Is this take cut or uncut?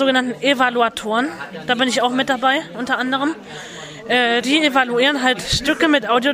uncut